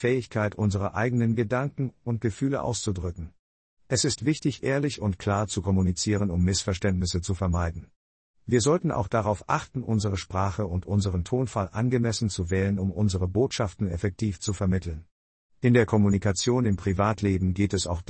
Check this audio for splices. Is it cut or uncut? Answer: uncut